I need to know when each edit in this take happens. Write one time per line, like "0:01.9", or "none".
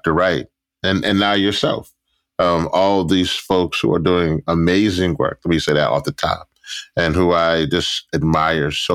none

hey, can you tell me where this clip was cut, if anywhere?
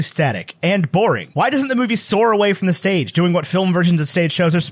none

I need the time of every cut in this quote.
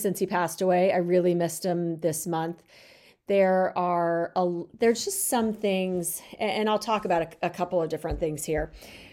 none

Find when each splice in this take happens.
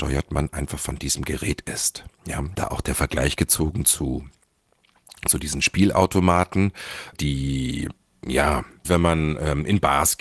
0:02.5
0:07.1
0:08.8

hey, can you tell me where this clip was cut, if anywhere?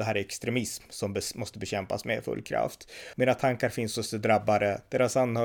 0:03.1

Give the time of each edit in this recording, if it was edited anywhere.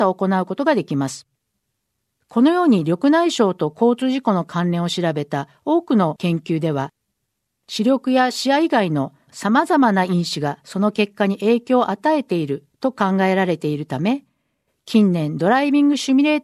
0:02.2

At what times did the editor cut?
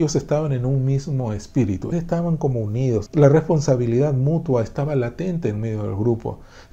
0:01.9
0:03.1

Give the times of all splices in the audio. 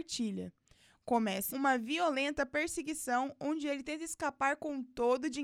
0:01.5

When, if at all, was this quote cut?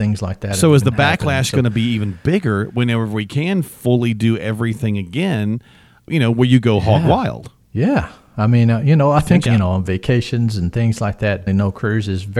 0:09.5
0:11.5

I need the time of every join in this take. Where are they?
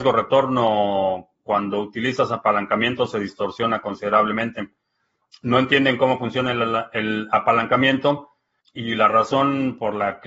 0:05.3
0:08.6

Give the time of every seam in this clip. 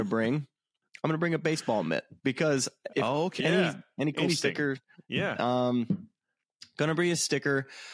0:02.2
0:03.4

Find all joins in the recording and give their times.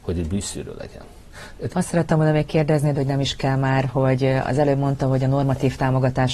0:01.7
0:02.9

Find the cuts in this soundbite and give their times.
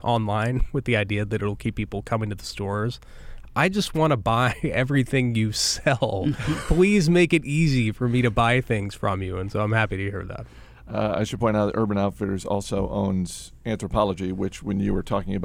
none

